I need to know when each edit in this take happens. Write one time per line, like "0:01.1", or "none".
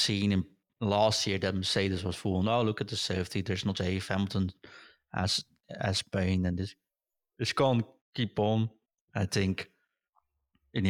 0:03.8